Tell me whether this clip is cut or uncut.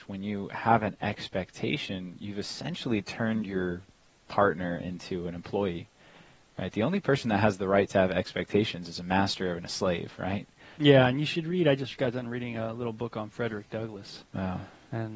cut